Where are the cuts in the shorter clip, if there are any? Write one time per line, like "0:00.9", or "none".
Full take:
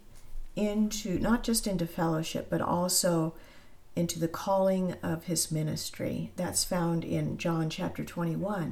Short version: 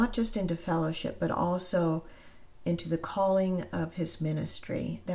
none